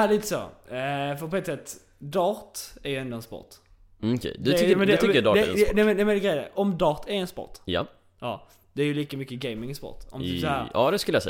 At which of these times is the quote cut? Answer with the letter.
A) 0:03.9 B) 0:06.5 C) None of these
B